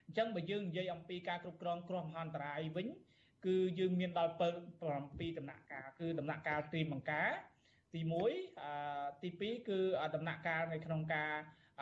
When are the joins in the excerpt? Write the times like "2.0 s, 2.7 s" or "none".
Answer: none